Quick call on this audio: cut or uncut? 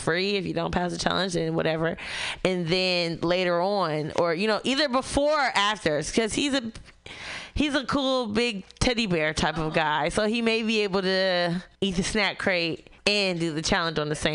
cut